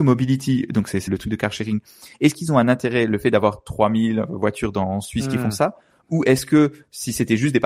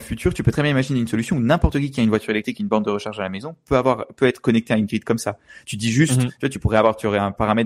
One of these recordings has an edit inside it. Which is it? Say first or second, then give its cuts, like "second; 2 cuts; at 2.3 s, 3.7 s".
first; 1 cut; at 1.1 s